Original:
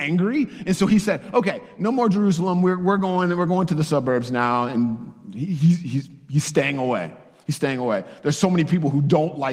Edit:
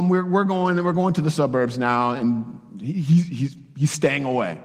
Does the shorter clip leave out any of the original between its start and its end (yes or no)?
no